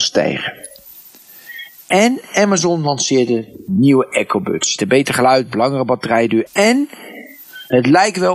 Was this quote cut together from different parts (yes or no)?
yes